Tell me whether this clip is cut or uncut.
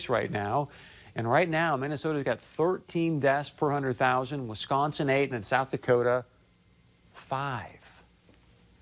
cut